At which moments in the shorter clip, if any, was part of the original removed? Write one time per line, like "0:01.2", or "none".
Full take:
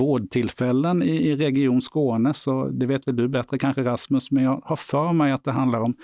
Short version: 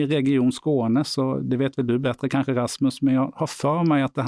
none